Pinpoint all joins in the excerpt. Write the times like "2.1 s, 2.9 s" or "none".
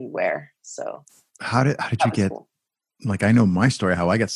none